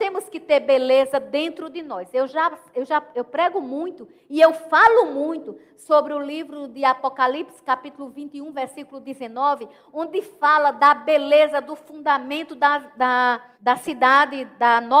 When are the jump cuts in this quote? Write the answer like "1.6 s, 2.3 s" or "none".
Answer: 13.5 s